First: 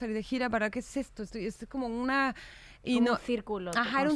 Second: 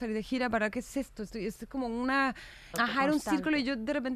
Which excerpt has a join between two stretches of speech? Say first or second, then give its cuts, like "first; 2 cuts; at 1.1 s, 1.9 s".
second; 1 cut; at 2.7 s